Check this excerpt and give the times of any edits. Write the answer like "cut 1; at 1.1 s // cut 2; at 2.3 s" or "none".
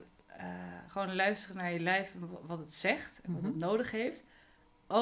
none